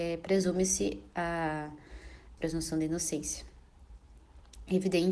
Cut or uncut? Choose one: cut